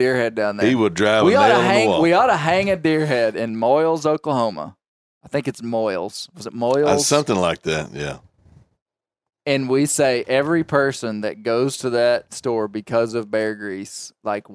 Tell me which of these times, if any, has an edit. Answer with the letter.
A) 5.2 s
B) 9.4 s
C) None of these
C